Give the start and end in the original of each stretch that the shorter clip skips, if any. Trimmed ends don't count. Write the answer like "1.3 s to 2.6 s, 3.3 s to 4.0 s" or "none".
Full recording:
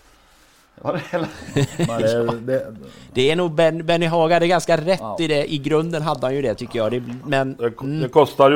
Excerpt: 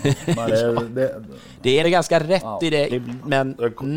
3.3 s to 4.4 s, 5.5 s to 6.9 s